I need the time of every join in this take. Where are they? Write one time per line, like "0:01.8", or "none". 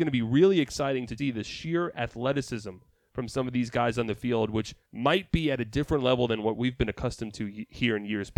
0:01.2
0:04.8